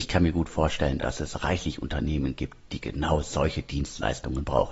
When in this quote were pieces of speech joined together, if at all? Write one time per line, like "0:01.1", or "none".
none